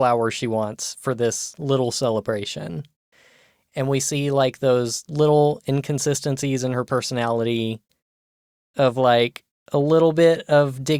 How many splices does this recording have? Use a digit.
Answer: 0